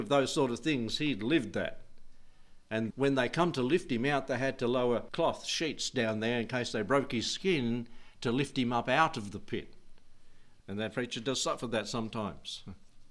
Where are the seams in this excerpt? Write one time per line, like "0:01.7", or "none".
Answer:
0:02.9
0:05.1
0:10.6